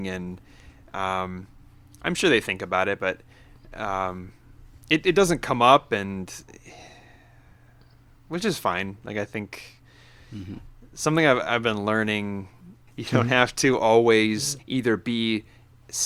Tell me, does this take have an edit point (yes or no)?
yes